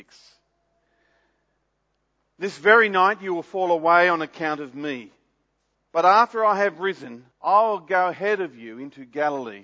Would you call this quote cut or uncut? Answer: cut